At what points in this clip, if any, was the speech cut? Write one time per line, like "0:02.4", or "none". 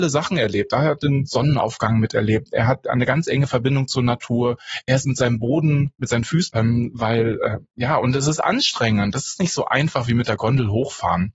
0:06.5